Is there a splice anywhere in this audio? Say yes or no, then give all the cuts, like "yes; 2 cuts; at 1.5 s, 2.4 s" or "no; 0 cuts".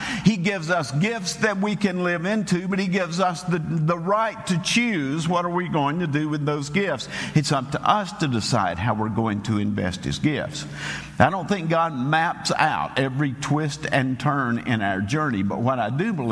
no; 0 cuts